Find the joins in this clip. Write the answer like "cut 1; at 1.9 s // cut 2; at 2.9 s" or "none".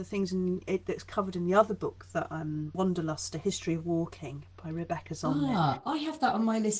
cut 1; at 2.7 s